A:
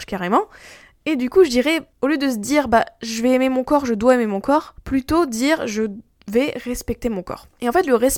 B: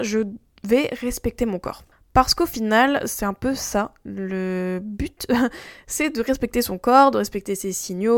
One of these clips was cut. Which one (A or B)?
B